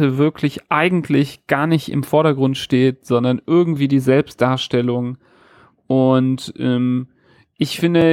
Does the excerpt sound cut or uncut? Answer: uncut